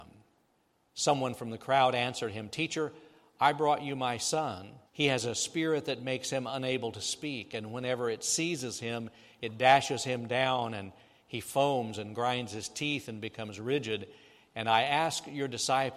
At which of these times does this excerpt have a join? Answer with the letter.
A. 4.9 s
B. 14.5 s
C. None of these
A